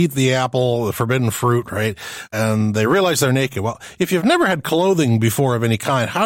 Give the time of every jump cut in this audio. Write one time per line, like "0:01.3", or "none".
none